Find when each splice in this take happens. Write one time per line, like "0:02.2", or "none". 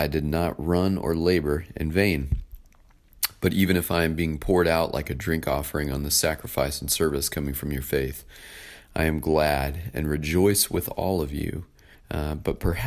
0:11.9